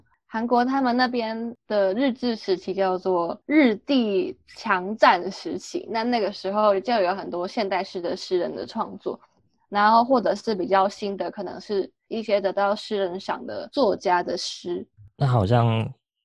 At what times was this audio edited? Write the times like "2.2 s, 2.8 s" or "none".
none